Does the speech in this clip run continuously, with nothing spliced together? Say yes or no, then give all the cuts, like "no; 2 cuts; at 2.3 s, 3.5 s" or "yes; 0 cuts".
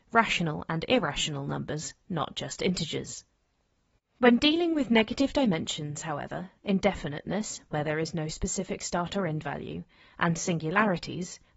yes; 0 cuts